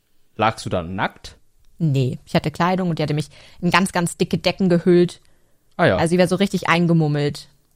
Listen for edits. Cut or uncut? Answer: uncut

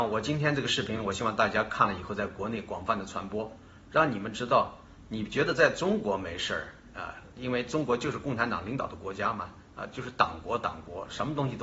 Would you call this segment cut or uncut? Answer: uncut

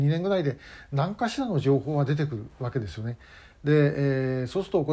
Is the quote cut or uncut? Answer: uncut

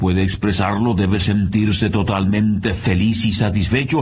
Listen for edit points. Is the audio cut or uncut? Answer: uncut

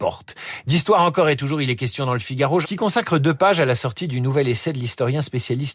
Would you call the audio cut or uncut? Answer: cut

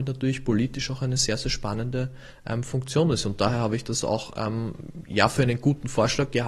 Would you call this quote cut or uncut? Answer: uncut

